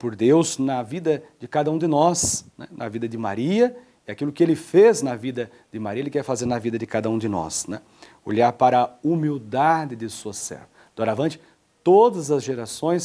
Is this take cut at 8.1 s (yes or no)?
no